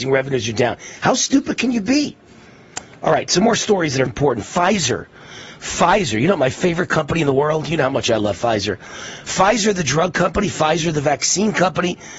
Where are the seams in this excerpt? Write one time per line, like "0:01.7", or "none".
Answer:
0:04.1